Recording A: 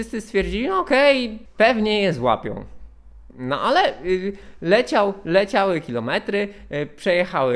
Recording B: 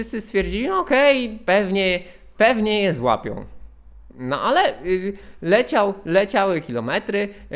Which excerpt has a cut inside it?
A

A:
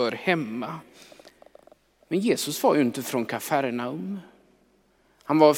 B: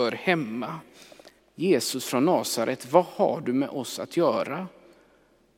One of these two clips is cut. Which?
B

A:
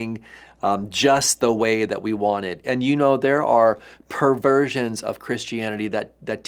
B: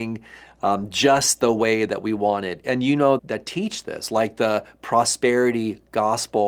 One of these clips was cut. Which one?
B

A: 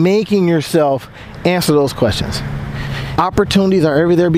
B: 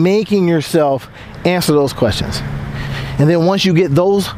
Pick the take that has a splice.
A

